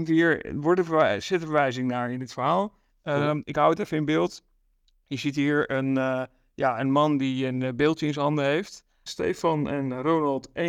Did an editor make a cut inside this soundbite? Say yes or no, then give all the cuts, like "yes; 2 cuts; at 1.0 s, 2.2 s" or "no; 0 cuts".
yes; 1 cut; at 9.1 s